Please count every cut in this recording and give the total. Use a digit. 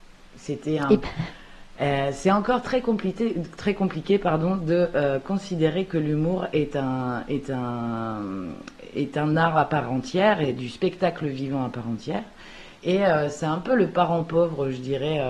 1